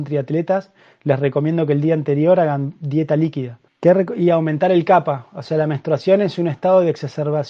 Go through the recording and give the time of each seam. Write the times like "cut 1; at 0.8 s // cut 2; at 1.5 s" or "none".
cut 1; at 3.7 s